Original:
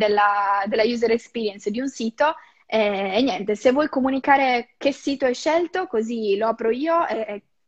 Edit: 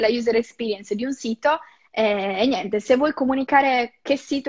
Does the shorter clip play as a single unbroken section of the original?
yes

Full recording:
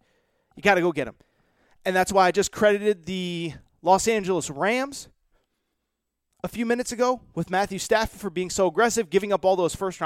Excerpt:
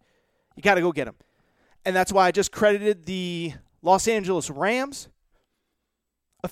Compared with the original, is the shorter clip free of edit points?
yes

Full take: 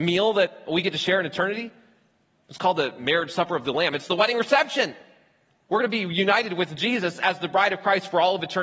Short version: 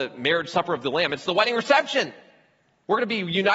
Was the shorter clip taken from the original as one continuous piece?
yes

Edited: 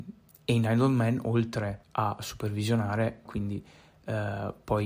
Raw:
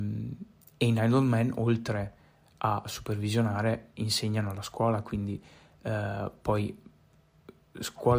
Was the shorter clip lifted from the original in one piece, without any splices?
no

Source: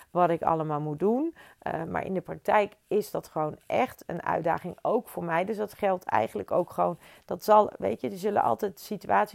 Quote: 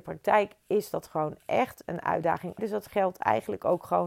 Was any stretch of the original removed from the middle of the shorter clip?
yes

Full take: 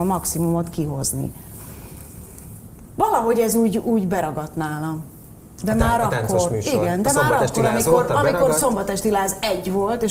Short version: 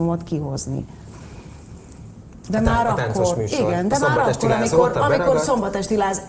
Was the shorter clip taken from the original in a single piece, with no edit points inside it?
no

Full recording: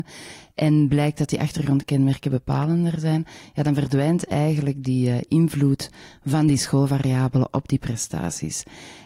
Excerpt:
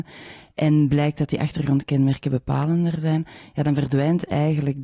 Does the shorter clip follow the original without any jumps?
yes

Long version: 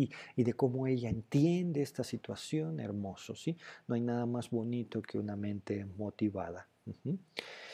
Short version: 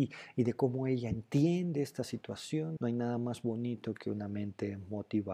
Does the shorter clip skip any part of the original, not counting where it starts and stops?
yes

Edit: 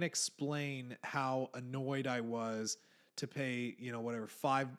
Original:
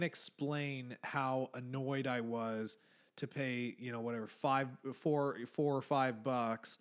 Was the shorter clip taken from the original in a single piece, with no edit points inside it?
yes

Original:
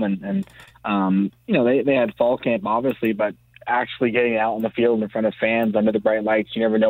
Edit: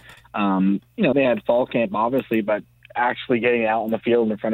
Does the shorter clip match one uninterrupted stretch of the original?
no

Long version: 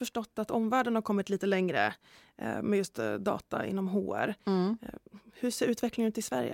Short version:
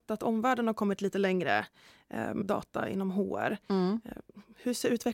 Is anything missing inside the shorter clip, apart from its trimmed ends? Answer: yes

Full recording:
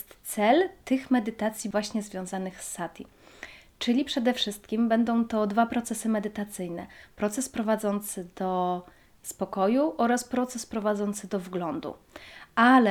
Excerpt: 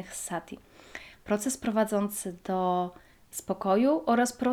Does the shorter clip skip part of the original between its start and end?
yes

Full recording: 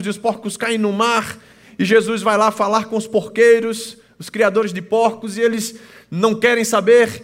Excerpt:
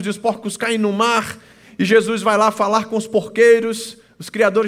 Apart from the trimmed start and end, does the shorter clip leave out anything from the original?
no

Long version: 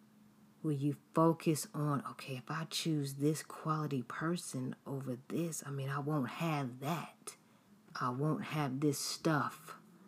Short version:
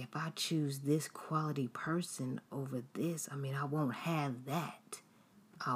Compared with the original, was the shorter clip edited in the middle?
no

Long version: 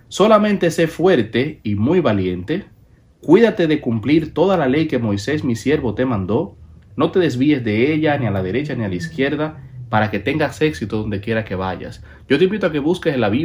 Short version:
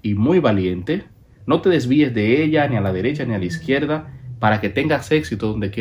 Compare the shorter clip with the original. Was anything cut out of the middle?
yes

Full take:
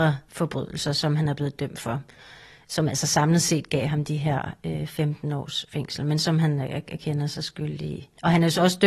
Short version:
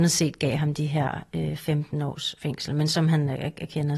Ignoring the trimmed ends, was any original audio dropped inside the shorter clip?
no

